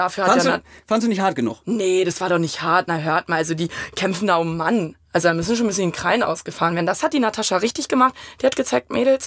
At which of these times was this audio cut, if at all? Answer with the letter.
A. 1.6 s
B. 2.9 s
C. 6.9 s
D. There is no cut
D